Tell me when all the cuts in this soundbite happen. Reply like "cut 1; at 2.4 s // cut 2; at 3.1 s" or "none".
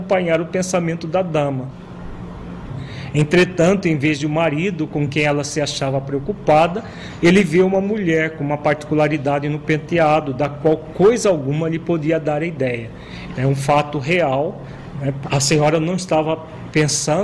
cut 1; at 13.3 s // cut 2; at 15.2 s